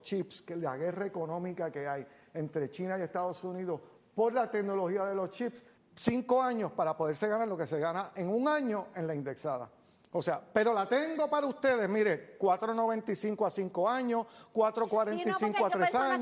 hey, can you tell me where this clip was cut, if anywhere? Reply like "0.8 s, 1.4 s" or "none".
5.7 s